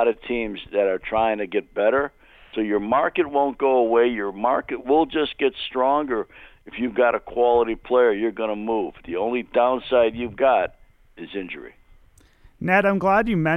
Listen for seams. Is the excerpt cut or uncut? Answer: uncut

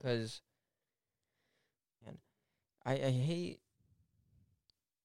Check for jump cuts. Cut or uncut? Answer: cut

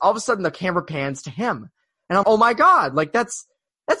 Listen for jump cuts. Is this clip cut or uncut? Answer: cut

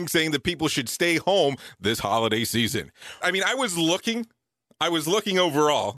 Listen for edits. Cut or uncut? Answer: cut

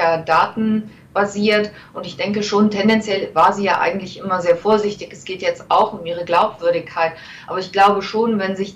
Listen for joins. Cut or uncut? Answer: uncut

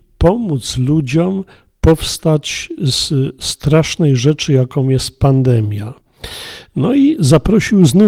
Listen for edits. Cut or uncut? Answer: uncut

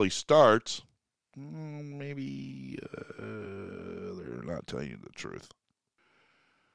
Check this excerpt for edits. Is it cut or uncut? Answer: uncut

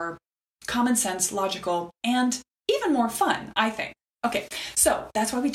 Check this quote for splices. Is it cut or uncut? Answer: uncut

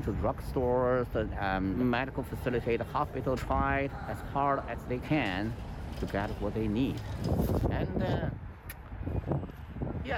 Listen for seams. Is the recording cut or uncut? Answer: cut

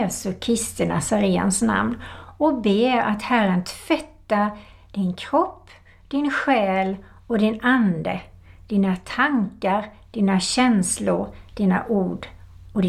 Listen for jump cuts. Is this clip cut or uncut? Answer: uncut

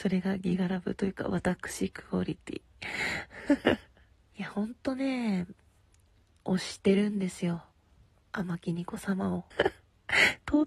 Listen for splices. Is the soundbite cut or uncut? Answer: cut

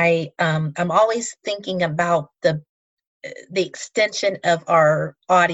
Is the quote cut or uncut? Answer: uncut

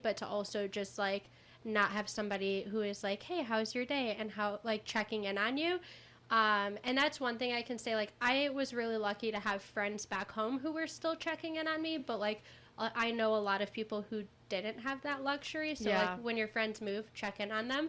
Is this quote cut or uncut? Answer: uncut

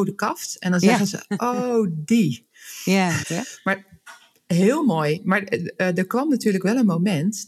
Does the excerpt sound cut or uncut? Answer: cut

